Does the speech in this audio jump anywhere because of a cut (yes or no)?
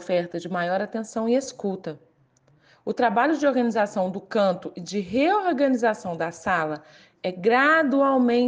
no